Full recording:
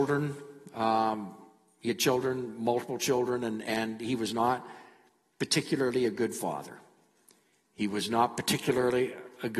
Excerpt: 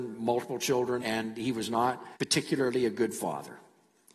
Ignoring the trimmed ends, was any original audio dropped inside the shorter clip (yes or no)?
yes